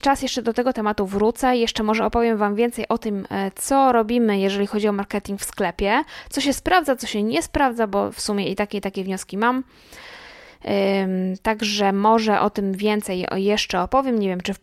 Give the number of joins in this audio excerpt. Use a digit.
0